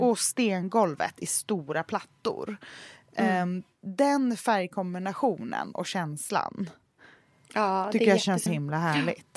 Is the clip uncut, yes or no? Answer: no